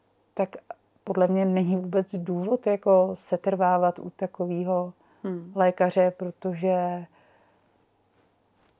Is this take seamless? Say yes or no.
yes